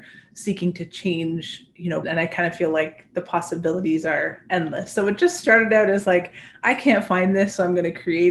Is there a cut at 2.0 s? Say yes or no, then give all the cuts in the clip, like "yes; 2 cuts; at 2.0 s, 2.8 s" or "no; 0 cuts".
yes; 1 cut; at 2.0 s